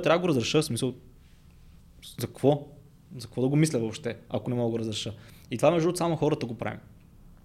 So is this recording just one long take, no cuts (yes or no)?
yes